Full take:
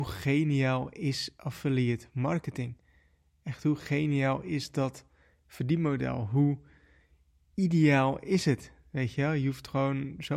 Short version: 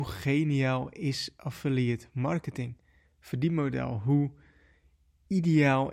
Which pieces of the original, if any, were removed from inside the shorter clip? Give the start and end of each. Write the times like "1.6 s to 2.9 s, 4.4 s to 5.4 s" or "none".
3.0 s to 5.3 s